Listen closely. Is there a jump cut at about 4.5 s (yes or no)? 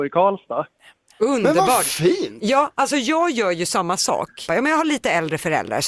yes